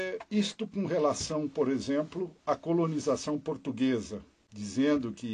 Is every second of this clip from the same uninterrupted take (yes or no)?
yes